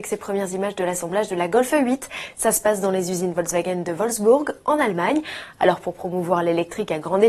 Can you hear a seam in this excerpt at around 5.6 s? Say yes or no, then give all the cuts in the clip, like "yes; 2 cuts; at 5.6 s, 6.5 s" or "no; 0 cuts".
yes; 1 cut; at 5.6 s